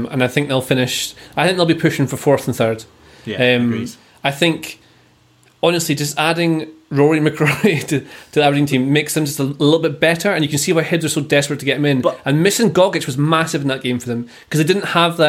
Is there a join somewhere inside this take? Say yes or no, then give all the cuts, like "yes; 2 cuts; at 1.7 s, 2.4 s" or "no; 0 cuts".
no; 0 cuts